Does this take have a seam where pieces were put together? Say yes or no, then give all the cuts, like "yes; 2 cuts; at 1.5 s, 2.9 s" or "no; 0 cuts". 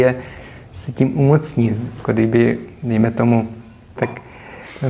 yes; 1 cut; at 4.0 s